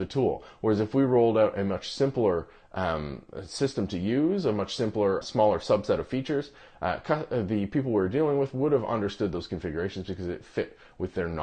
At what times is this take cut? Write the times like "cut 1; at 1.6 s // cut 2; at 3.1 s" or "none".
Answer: cut 1; at 5.2 s